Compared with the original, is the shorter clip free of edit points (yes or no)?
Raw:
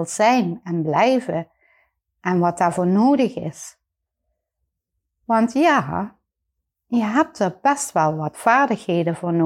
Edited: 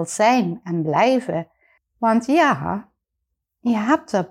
no